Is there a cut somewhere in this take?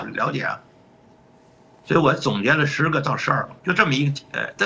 yes; 1 cut; at 3.6 s

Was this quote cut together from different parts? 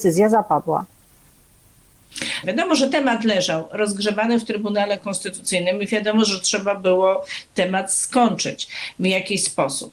yes; 1 cut; at 2.4 s

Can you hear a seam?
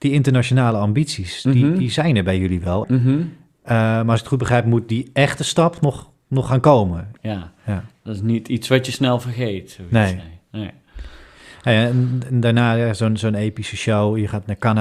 yes; 2 cuts; at 2.8 s, 7.2 s

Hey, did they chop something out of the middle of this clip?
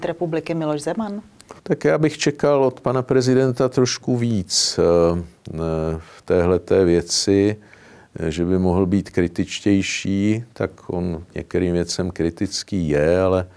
yes; 1 cut; at 1.6 s

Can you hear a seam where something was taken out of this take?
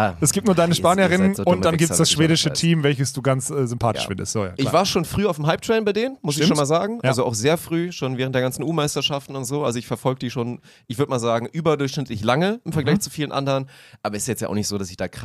no; 0 cuts

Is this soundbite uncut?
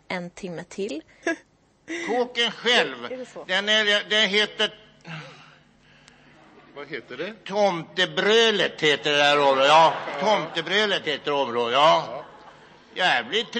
no; 1 cut; at 1.2 s

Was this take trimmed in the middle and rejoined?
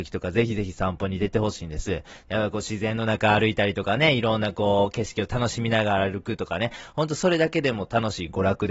yes; 1 cut; at 2.3 s

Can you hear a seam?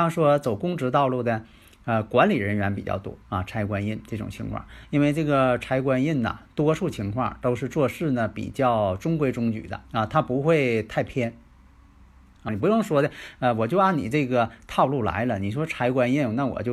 yes; 3 cuts; at 3.2 s, 9.9 s, 12.5 s

